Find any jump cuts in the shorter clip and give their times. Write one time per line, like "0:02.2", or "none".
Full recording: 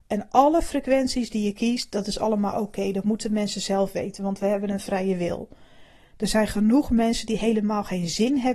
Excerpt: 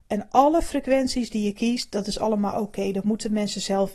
none